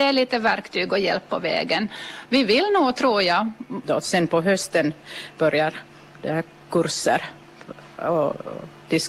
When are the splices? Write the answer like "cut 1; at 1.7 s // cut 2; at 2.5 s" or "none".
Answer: cut 1; at 2.3 s // cut 2; at 3.8 s